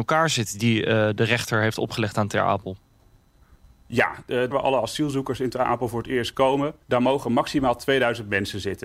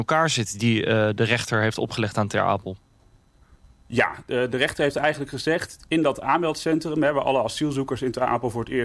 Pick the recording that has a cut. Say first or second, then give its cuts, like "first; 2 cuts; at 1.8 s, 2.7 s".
first; 2 cuts; at 4.5 s, 6.8 s